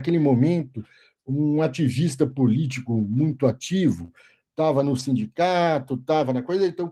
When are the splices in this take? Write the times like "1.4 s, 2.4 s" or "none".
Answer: none

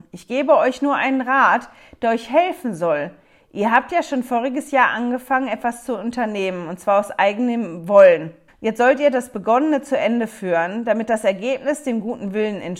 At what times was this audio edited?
8.5 s

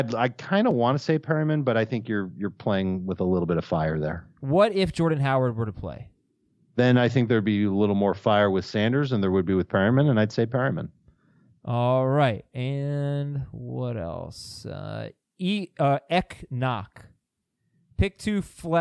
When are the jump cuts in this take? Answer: none

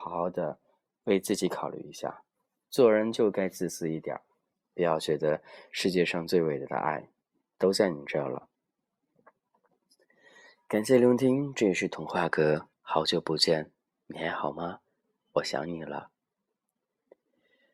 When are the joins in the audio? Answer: 12.7 s

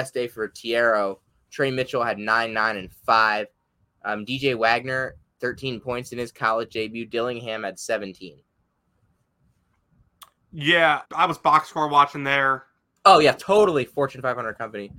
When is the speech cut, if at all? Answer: 11.0 s, 13.0 s

